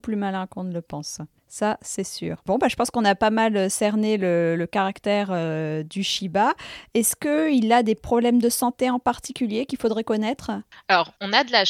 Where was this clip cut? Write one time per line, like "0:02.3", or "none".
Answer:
none